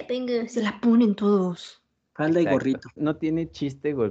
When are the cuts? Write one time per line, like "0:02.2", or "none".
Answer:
0:03.0